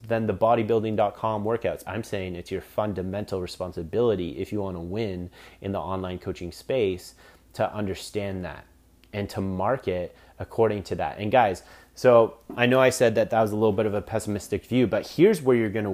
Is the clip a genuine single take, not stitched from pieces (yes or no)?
no